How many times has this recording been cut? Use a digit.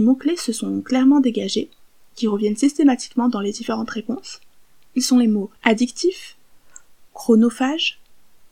1